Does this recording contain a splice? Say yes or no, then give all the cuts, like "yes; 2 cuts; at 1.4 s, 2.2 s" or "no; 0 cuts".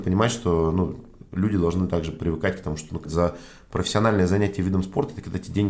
yes; 1 cut; at 3.1 s